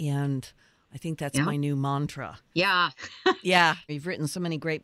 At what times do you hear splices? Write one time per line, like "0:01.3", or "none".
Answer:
0:02.5
0:03.9